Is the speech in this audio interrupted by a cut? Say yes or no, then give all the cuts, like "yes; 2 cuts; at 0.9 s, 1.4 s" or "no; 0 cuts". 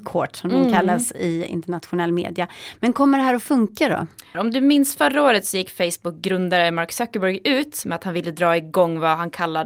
yes; 1 cut; at 4.3 s